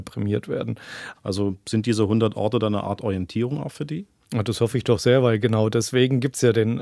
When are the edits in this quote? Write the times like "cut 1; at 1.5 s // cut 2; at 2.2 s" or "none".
cut 1; at 1.1 s